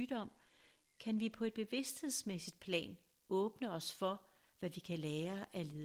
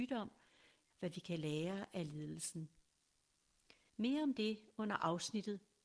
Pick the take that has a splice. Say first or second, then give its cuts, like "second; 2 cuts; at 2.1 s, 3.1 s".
second; 2 cuts; at 0.9 s, 3.9 s